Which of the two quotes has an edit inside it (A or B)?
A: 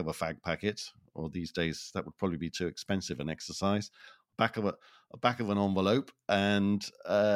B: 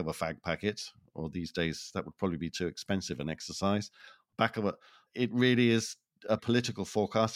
B